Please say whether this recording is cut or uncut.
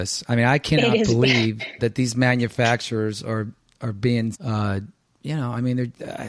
cut